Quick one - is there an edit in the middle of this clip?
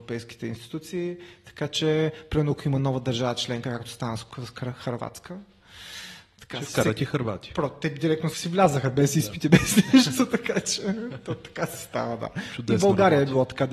yes; 1 cut; at 8.3 s

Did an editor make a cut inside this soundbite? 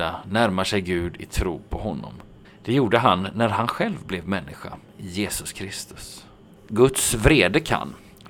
yes; 2 cuts; at 2.4 s, 6.5 s

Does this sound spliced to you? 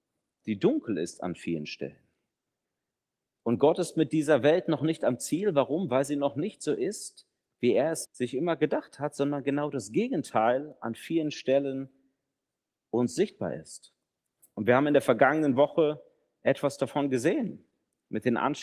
yes; 1 cut; at 8.0 s

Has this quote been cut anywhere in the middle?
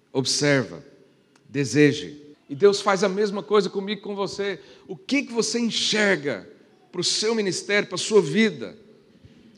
yes; 1 cut; at 2.3 s

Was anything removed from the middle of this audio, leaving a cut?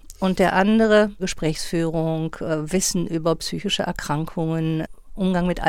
yes; 1 cut; at 1.2 s

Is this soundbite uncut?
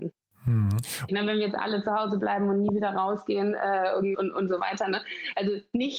no; 2 cuts; at 1.1 s, 4.1 s

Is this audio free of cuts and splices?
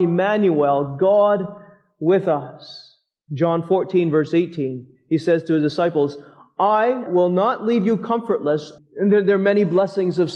no; 2 cuts; at 7.1 s, 8.8 s

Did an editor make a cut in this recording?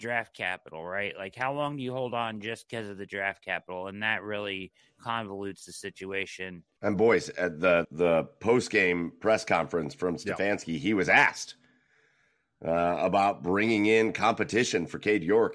yes; 2 cuts; at 6.8 s, 7.8 s

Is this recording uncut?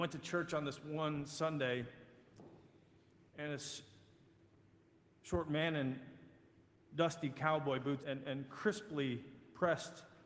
no; 1 cut; at 8.0 s

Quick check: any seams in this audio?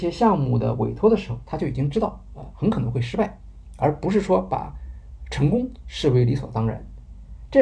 no; 0 cuts

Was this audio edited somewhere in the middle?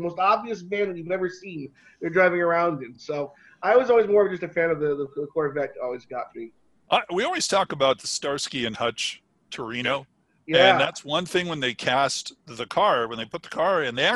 no; 0 cuts

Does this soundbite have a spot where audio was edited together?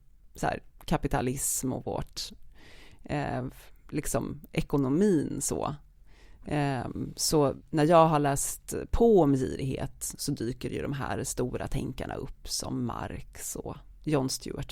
no; 0 cuts

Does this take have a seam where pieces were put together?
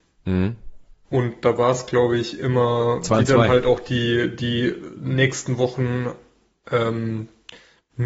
no; 0 cuts

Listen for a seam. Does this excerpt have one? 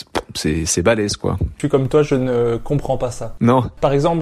no; 0 cuts

